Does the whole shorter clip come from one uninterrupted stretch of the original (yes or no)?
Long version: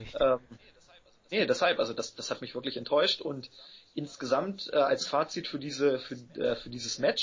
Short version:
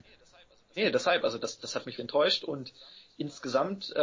no